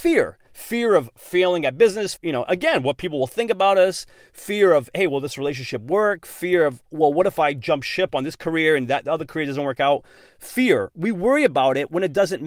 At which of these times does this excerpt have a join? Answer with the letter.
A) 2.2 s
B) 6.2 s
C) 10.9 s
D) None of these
A